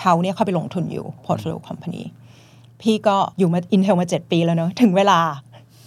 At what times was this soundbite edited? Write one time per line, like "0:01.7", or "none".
0:03.3